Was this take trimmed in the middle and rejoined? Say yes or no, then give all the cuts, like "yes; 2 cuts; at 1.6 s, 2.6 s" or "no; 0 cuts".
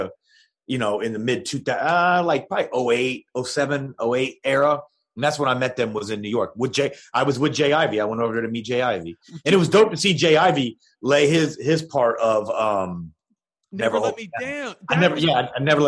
no; 0 cuts